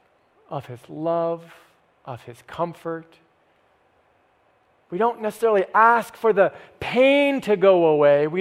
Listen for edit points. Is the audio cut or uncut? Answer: uncut